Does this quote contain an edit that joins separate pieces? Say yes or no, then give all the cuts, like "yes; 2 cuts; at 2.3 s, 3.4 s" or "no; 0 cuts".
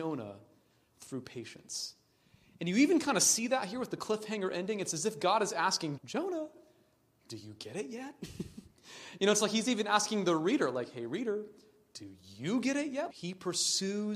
yes; 2 cuts; at 6.0 s, 13.1 s